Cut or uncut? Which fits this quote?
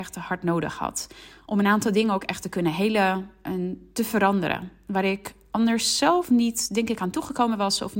uncut